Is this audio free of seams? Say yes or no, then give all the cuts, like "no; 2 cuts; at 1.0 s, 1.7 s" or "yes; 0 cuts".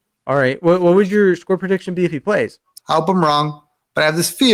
no; 1 cut; at 2.8 s